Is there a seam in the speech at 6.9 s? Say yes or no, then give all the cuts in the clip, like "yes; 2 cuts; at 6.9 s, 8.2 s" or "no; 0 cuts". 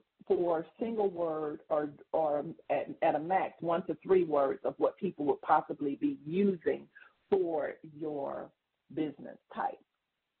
no; 0 cuts